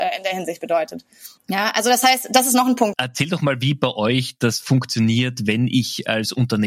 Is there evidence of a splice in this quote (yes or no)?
yes